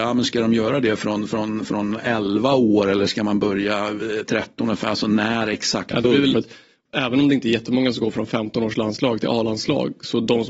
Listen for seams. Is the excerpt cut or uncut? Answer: cut